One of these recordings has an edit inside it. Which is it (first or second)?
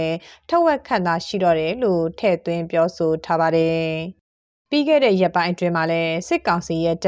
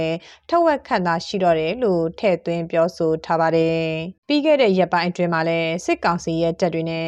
second